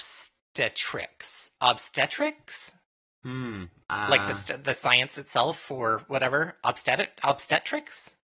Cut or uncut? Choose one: uncut